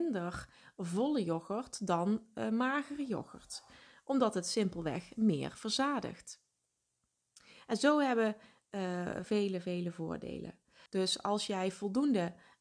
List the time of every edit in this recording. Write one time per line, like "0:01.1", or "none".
0:09.2
0:10.9